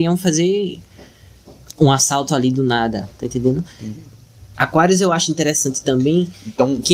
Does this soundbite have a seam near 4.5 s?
yes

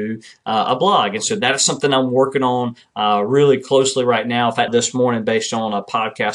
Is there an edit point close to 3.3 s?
no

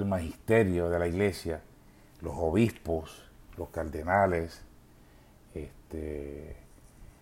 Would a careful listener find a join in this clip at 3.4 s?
no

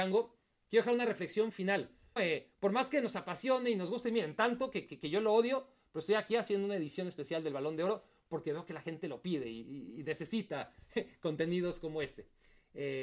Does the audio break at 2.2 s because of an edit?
yes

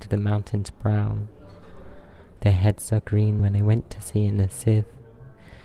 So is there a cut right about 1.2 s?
no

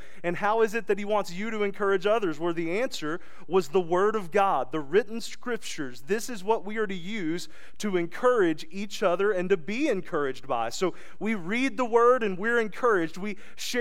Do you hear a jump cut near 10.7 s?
no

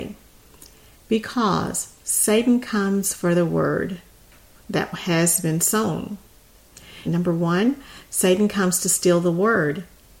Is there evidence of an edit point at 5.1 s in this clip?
no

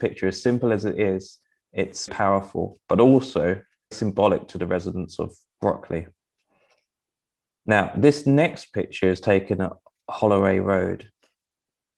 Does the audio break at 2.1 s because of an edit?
yes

